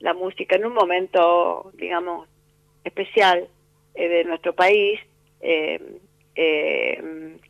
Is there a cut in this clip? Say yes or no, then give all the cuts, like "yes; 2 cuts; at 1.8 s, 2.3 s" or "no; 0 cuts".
no; 0 cuts